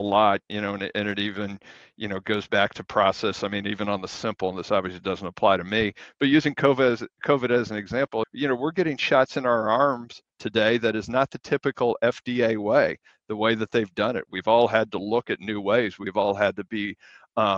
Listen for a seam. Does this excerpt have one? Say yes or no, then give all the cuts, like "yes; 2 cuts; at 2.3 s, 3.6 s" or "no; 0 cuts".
yes; 1 cut; at 8.2 s